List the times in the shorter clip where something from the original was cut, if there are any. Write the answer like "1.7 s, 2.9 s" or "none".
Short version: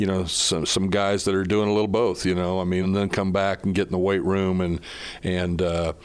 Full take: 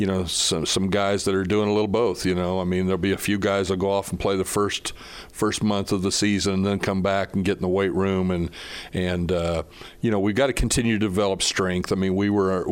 2.8 s